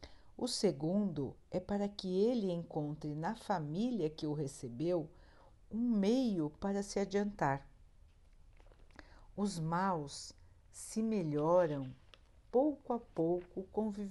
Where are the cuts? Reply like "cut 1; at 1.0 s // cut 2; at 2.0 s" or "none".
none